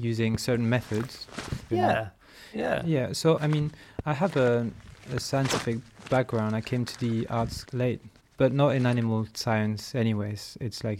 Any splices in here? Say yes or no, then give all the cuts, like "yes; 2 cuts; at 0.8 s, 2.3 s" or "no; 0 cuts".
yes; 3 cuts; at 1.7 s, 3.4 s, 7.6 s